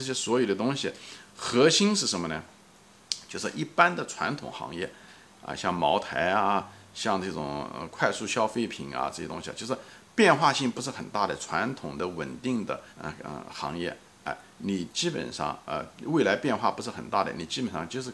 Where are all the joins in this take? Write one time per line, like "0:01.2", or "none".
0:12.9

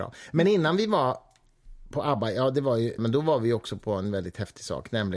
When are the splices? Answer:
0:03.0

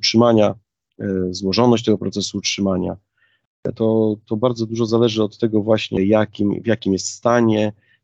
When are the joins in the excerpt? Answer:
0:03.7
0:06.0

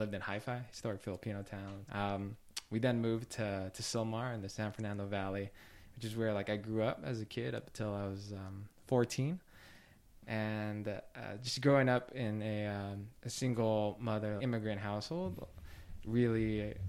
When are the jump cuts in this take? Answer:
0:01.9
0:14.4

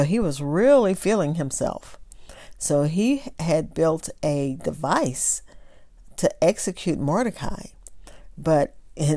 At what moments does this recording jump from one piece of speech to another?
none

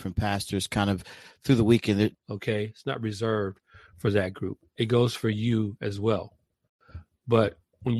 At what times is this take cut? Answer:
0:02.1

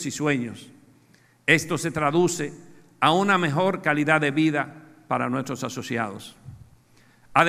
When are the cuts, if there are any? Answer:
none

